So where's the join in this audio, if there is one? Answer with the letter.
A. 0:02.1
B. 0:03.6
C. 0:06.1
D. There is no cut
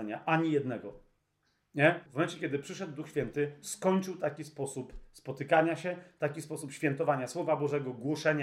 A